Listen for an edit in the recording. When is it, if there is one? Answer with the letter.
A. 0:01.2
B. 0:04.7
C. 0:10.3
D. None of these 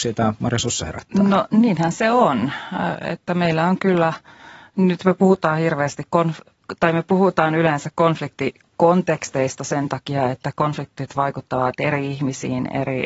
D